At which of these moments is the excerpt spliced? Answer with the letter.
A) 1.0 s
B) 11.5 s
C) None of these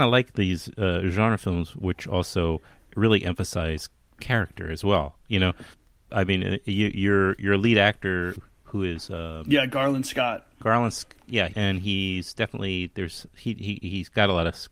B